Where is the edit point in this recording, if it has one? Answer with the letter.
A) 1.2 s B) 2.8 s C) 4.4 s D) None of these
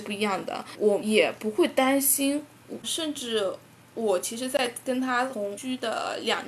B